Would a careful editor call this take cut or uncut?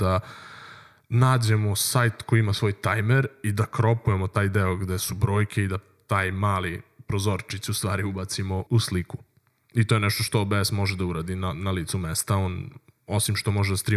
cut